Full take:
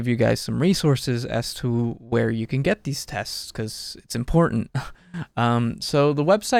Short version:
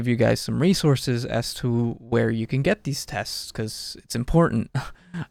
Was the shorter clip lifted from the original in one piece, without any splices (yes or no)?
yes